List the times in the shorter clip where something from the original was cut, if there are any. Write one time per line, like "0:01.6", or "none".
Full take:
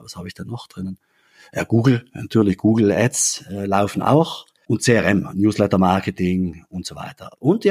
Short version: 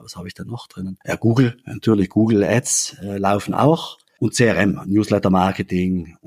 0:01.0